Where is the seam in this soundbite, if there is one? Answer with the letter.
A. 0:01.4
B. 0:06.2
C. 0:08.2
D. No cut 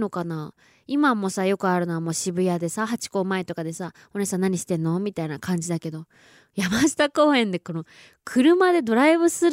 D